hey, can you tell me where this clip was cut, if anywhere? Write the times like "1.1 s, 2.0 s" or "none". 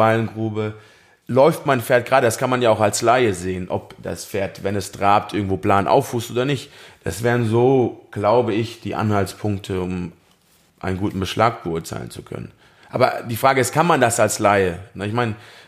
none